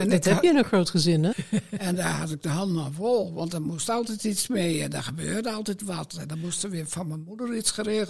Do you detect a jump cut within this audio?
yes; 1 cut; at 1.3 s

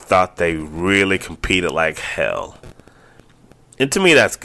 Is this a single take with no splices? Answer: yes; 0 cuts

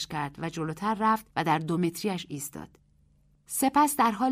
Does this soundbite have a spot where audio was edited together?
yes; 1 cut; at 1.3 s

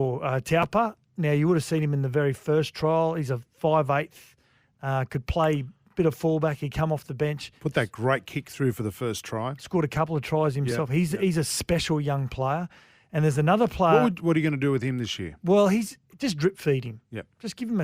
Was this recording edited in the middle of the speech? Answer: no; 0 cuts

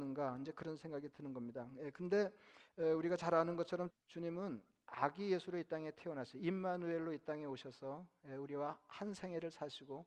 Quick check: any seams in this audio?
yes; 1 cut; at 3.9 s

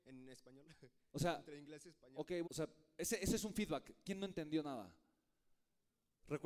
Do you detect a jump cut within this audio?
yes; 1 cut; at 2.4 s

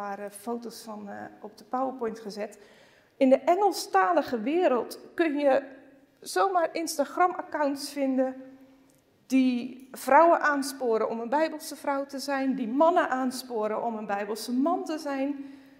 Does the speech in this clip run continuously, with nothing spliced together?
yes; 0 cuts

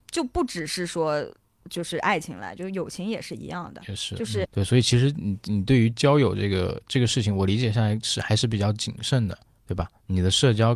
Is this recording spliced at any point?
yes; 1 cut; at 4.4 s

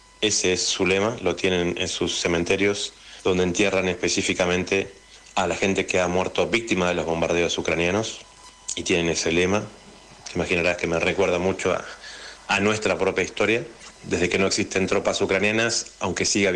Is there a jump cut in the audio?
yes; 1 cut; at 13.9 s

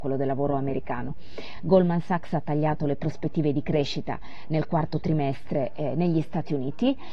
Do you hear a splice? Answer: no; 0 cuts

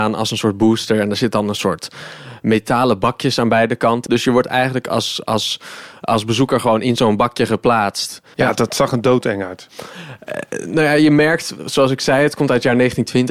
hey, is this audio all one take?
no; 2 cuts; at 4.1 s, 8.3 s

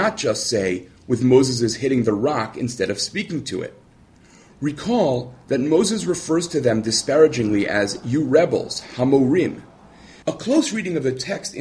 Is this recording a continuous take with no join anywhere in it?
no; 1 cut; at 10.2 s

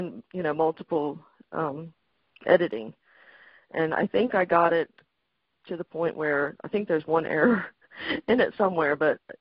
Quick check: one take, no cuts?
yes; 0 cuts

